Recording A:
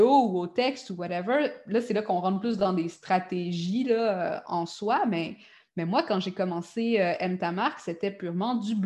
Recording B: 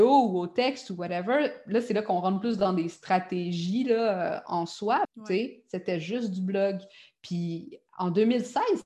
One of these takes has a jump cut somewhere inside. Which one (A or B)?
B